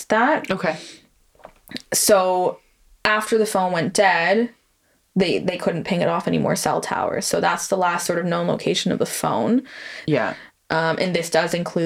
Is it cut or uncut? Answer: cut